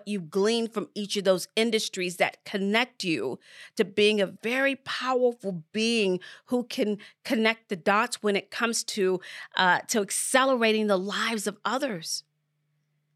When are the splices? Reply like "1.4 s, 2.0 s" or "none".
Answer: none